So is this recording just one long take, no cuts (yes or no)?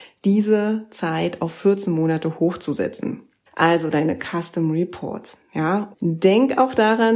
no